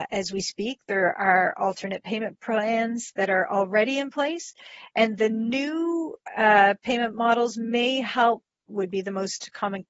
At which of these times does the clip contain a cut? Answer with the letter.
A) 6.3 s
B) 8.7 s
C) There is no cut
B